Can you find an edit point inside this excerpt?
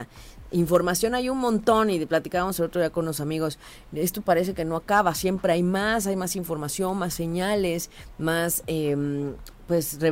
no; 0 cuts

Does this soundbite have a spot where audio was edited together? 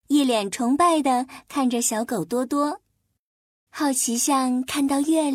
yes; 1 cut; at 3.7 s

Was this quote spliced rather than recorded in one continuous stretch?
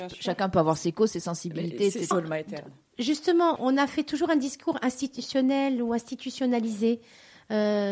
yes; 2 cuts; at 2.1 s, 3.6 s

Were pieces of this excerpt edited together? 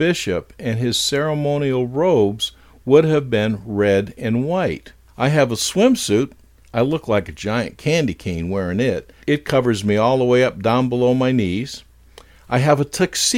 yes; 1 cut; at 5.1 s

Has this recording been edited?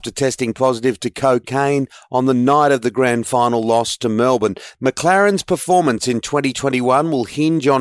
yes; 1 cut; at 4.7 s

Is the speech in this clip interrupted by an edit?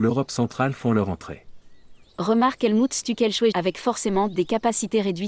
yes; 2 cuts; at 2.0 s, 3.5 s

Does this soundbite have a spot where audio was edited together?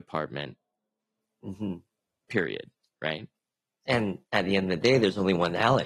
no; 0 cuts

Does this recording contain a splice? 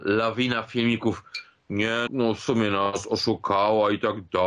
yes; 1 cut; at 2.1 s

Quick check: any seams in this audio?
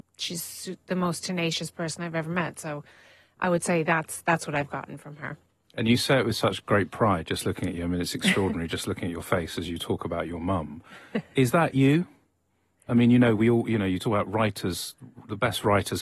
no; 0 cuts

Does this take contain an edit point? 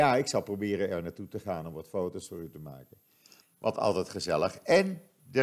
yes; 1 cut; at 3.4 s

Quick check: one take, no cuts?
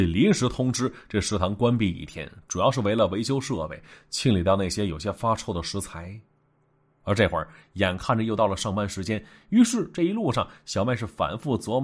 no; 1 cut; at 6.9 s

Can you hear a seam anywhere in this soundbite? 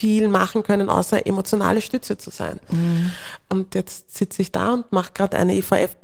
no; 0 cuts

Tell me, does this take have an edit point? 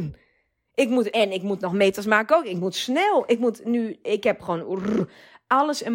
yes; 1 cut; at 1.1 s

